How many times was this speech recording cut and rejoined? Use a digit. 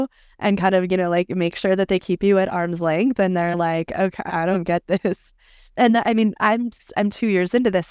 1